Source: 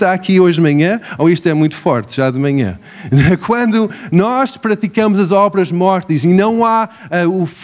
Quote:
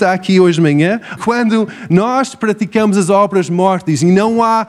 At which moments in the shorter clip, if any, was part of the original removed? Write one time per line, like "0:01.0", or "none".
0:01.2

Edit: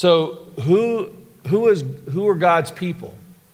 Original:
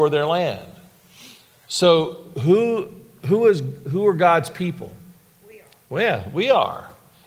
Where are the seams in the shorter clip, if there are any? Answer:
none

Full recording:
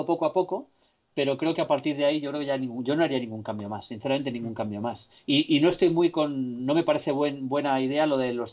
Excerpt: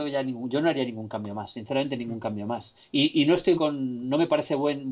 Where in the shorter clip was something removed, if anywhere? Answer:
0:03.6

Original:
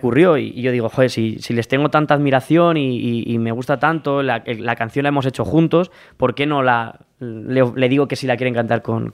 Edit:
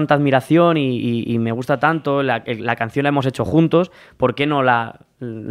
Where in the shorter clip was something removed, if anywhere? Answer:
none

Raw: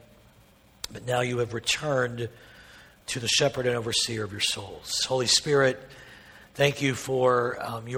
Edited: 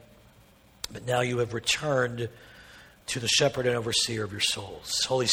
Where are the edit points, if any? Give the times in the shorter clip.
none

